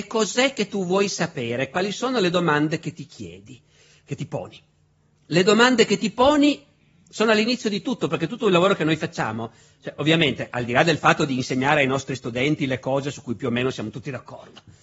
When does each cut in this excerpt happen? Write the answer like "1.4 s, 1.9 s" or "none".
none

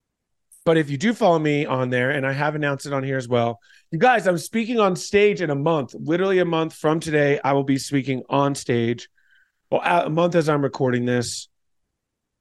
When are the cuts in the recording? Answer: none

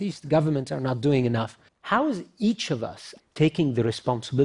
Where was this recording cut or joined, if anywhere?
1.7 s, 3.2 s

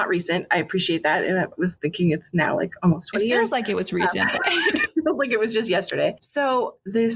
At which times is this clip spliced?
none

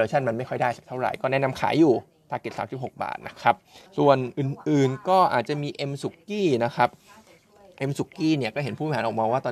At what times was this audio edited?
3.9 s

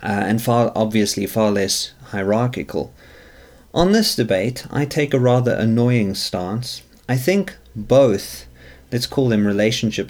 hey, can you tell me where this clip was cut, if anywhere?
none

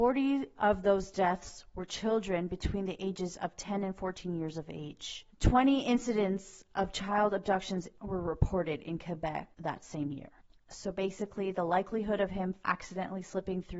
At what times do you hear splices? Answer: none

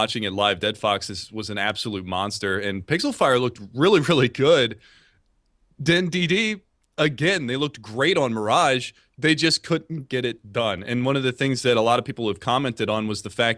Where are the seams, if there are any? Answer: none

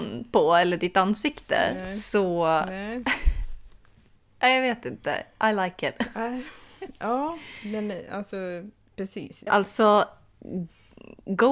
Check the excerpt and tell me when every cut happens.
9.5 s

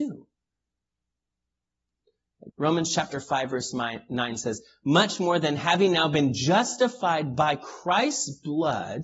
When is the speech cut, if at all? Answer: 2.5 s

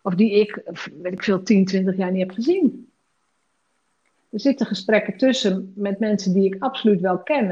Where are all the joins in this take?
none

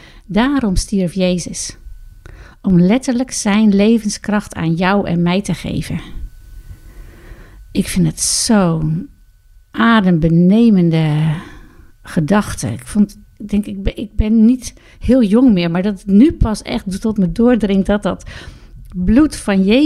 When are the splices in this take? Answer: none

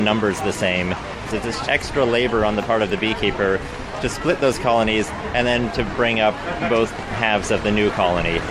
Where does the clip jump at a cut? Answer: 1.6 s

